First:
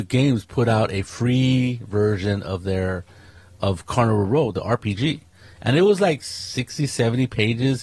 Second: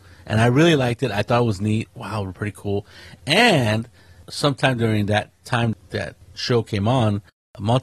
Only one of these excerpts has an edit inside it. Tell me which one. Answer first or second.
second